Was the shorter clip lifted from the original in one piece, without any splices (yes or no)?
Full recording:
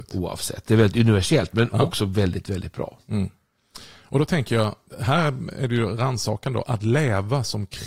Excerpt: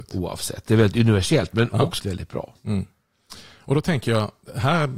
no